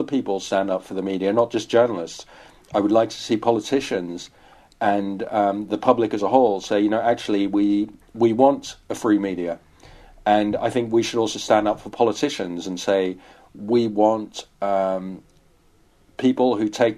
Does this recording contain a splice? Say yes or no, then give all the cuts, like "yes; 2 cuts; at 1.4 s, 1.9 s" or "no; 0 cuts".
no; 0 cuts